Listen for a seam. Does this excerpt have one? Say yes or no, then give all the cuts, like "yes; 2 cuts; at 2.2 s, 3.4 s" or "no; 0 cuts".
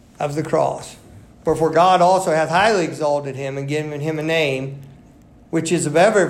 no; 0 cuts